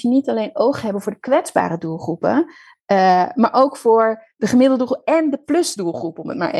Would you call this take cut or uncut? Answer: uncut